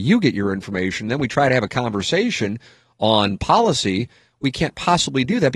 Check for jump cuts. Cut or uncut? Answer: uncut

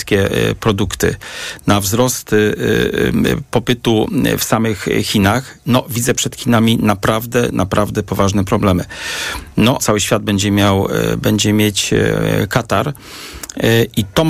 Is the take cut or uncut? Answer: cut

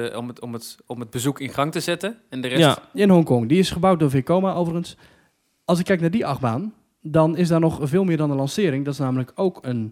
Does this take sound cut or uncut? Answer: cut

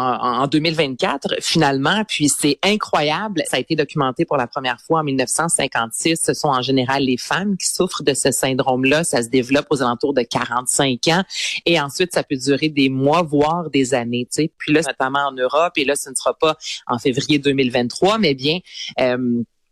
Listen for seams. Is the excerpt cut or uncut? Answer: cut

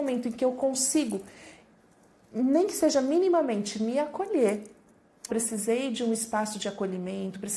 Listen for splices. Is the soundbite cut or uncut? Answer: cut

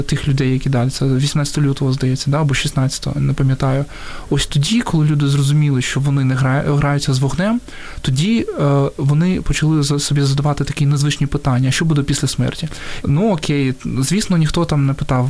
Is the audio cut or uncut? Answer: cut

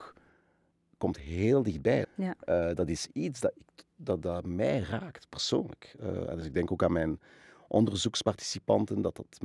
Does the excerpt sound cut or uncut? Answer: cut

